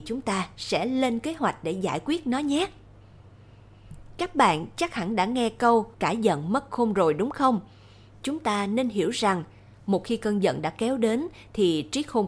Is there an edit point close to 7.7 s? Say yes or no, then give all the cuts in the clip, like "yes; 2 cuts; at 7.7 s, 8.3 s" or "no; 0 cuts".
no; 1 cut; at 5.9 s